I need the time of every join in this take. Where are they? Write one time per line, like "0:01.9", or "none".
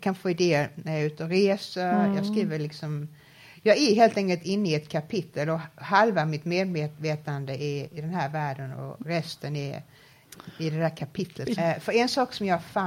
0:07.9
0:11.6

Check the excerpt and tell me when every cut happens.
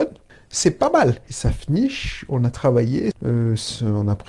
0:01.3
0:03.1

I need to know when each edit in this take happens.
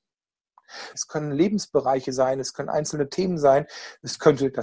0:00.9

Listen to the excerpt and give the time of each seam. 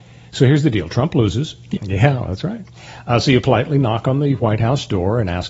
0:01.8

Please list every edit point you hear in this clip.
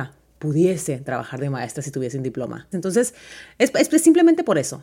0:02.7

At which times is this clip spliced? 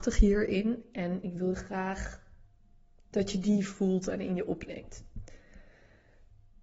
none

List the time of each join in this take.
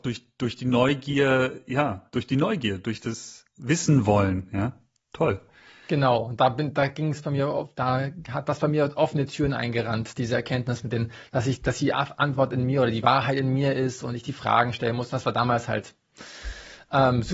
none

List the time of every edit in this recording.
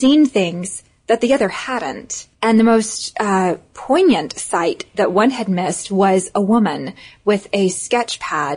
0:02.3

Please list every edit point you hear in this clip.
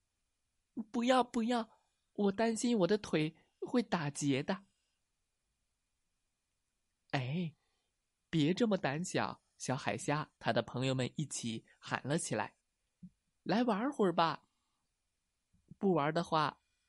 0:10.4
0:12.6

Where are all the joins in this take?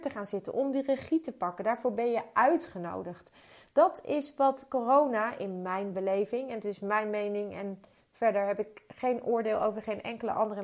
none

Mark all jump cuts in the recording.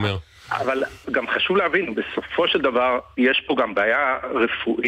0:01.0

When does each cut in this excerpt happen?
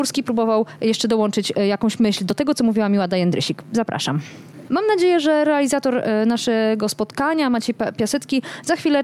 0:04.7

